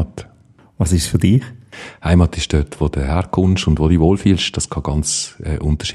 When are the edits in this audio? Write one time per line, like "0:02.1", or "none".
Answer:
none

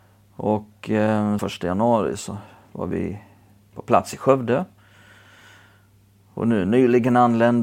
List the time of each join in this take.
0:01.4

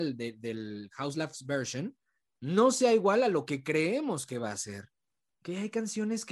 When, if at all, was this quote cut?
0:05.3

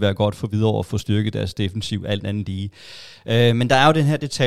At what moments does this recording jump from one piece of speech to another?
none

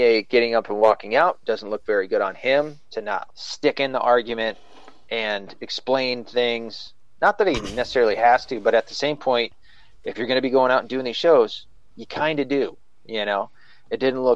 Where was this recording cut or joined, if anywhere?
0:03.3

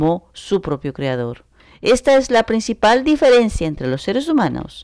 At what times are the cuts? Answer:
none

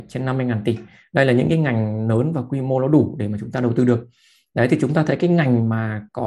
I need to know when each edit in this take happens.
none

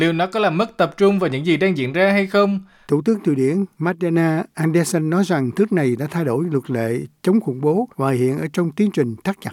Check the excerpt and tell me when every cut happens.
0:02.8
0:07.9

